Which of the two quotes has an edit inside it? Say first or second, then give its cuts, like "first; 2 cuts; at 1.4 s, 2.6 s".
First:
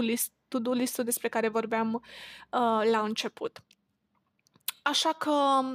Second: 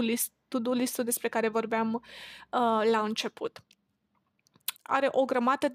second; 1 cut; at 4.8 s